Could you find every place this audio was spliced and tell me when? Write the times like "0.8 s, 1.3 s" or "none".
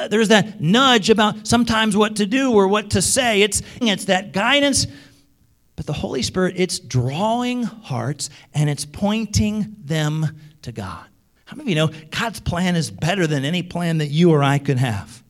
3.8 s, 11.4 s